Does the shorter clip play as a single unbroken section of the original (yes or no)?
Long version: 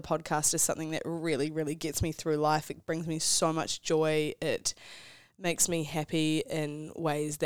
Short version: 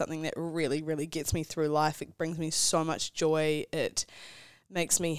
yes